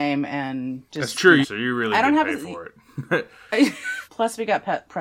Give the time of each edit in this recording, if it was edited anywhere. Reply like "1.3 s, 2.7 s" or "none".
1.4 s, 4.1 s

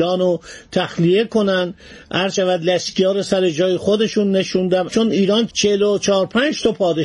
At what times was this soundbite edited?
5.5 s

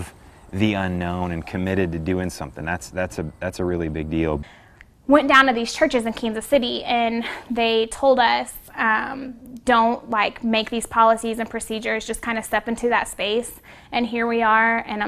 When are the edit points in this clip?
none

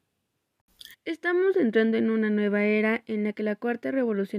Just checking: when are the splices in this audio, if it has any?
0.9 s

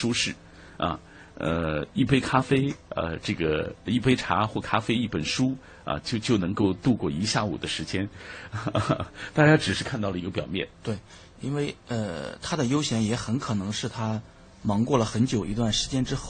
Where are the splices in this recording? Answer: none

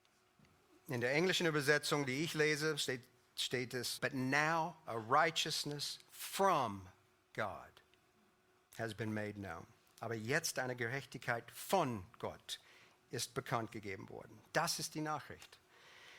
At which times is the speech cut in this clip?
4.0 s

